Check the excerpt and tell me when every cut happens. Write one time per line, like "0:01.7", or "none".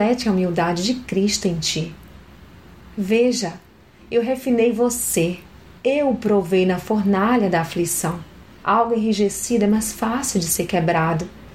0:05.7
0:08.6